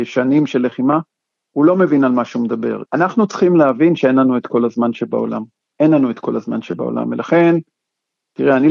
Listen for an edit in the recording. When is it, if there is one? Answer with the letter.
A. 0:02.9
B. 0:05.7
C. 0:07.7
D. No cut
A